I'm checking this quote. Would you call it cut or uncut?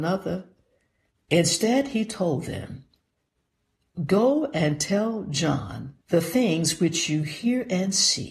cut